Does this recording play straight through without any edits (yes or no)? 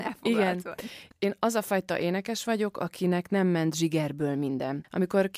yes